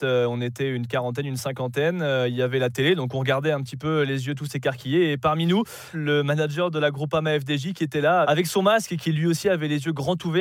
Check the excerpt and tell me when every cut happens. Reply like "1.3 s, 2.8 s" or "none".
5.9 s, 8.2 s

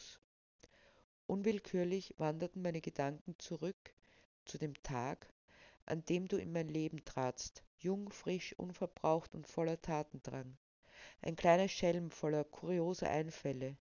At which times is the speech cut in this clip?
none

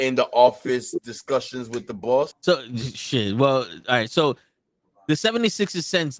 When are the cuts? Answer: 2.3 s

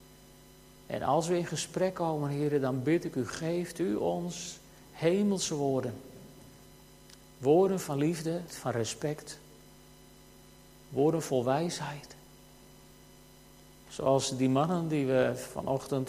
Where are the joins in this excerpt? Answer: 8.5 s

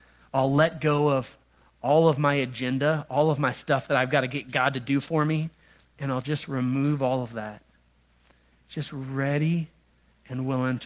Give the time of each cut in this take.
none

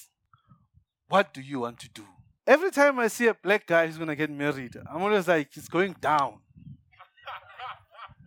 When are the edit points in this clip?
2.4 s

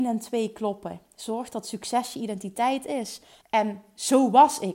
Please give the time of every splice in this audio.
3.4 s

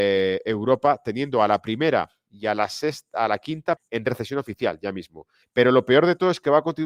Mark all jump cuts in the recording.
3.8 s, 5.4 s

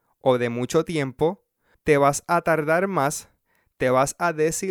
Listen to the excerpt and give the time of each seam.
1.7 s

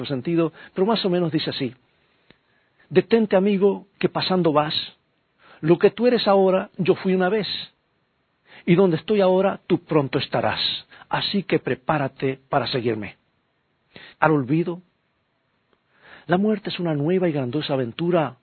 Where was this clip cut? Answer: 14.1 s

